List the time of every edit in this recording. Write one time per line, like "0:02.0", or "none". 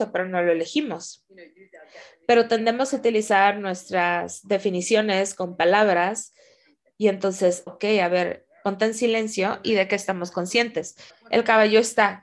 0:07.7
0:11.1